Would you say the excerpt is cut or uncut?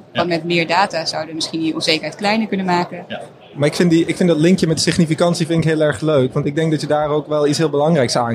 cut